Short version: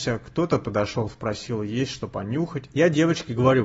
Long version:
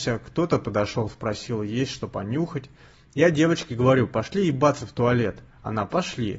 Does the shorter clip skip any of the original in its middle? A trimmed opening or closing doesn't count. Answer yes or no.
yes